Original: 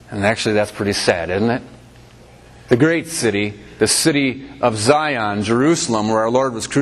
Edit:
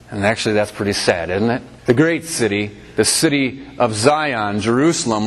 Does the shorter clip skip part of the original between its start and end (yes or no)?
yes